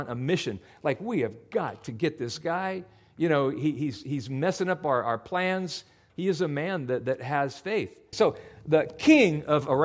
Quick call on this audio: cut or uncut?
cut